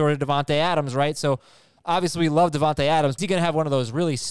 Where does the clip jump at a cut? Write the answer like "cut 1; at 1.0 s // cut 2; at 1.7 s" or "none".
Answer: cut 1; at 3.2 s